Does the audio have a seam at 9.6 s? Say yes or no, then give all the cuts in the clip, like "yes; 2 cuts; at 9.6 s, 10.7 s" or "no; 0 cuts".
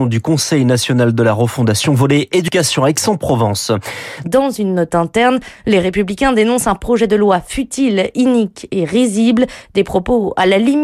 no; 1 cut; at 4.2 s